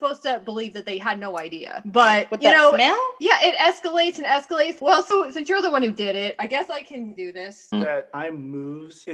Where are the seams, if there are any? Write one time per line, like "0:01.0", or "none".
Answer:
0:04.8
0:07.7